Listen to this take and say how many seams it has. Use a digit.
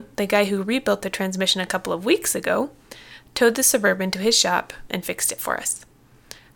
1